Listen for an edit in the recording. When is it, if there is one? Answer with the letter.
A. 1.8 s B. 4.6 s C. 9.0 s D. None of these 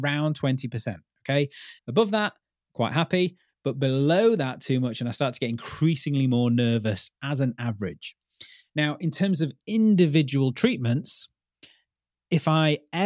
A